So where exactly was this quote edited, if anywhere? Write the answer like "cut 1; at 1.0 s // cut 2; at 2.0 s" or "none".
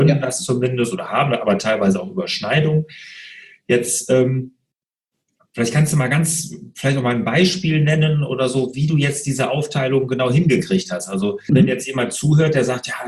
cut 1; at 11.5 s